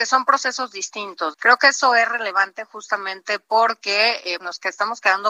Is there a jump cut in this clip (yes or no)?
yes